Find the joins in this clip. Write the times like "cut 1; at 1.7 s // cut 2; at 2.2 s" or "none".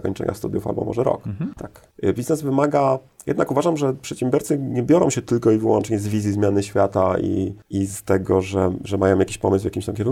cut 1; at 1.6 s